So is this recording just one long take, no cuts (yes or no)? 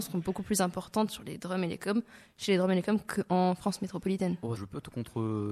no